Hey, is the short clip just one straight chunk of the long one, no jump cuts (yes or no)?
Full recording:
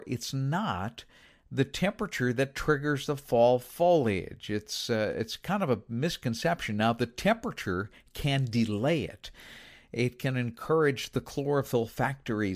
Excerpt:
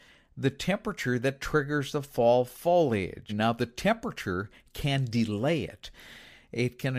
no